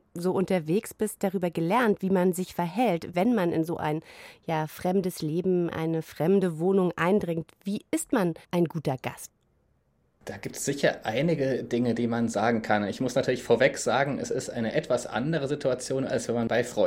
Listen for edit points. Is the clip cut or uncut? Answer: cut